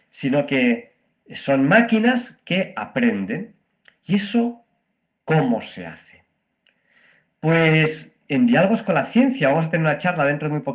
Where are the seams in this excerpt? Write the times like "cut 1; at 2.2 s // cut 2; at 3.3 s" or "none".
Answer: none